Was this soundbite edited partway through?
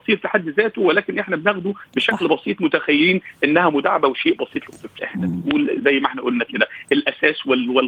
yes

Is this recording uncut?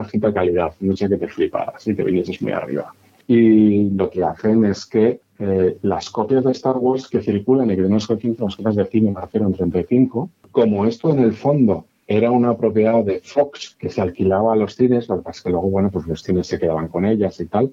yes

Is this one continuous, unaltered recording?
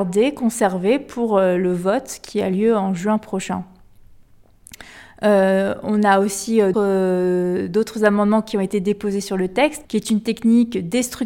no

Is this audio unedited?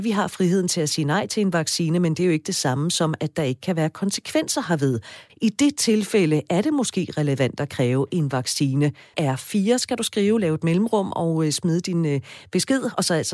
no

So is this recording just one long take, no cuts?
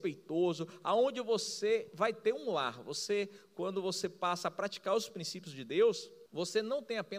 no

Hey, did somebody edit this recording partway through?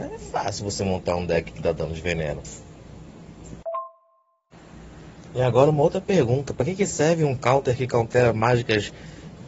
no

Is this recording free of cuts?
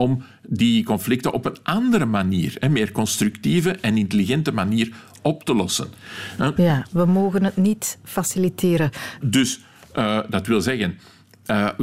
no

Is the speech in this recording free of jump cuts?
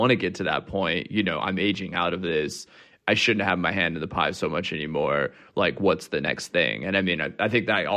yes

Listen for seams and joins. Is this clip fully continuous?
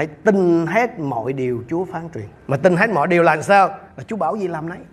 no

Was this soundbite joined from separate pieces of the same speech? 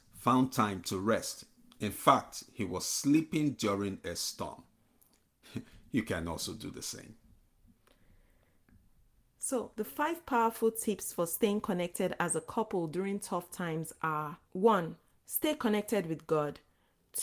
yes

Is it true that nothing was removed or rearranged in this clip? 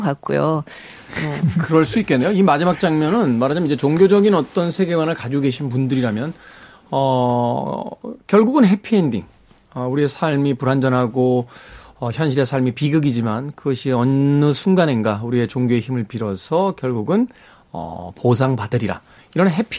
yes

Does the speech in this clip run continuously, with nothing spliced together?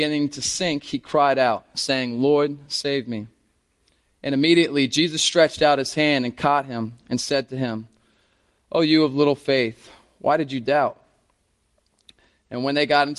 yes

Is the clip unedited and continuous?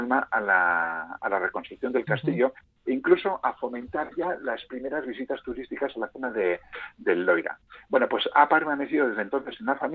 yes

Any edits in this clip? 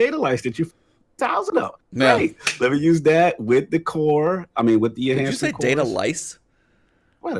no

